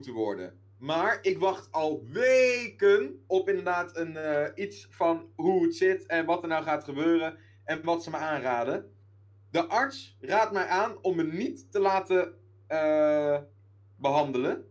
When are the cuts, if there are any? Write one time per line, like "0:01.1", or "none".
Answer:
none